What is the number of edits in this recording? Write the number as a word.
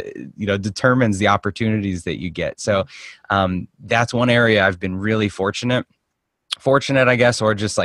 zero